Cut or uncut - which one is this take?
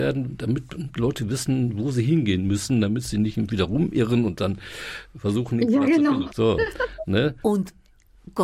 cut